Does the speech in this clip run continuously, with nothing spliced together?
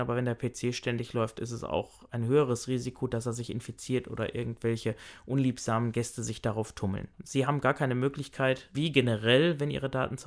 no; 1 cut; at 7.1 s

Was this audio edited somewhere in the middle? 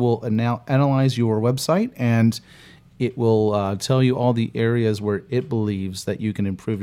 no; 0 cuts

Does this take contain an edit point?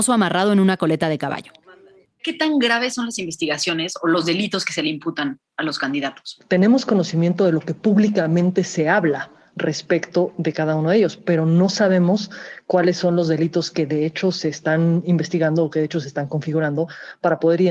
yes; 2 cuts; at 2.0 s, 5.5 s

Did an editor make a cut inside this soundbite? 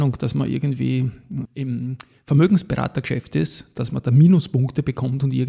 yes; 1 cut; at 1.4 s

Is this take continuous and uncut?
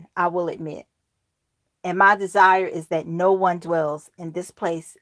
yes; 0 cuts

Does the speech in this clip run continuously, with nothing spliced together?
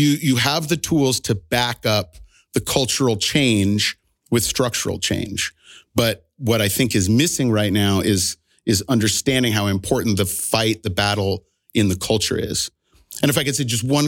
yes; 0 cuts

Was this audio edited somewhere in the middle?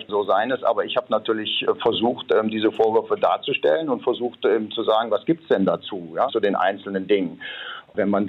yes; 1 cut; at 6.3 s

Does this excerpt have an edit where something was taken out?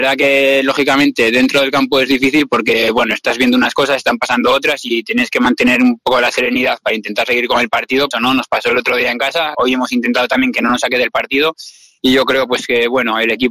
yes; 2 cuts; at 8.1 s, 9.5 s

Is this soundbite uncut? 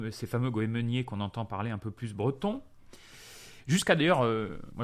yes; 0 cuts

